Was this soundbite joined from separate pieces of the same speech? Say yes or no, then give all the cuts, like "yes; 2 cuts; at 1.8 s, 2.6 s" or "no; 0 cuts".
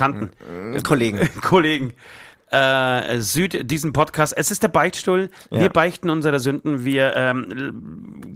no; 0 cuts